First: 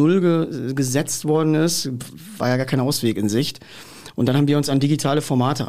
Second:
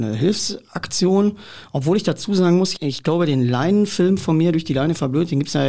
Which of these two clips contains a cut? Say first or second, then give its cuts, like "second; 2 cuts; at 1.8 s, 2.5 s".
second; 1 cut; at 2.7 s